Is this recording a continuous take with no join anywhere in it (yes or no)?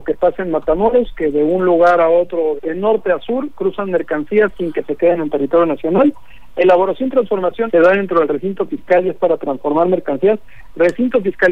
no